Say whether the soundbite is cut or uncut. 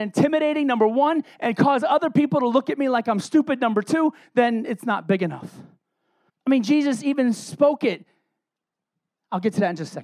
cut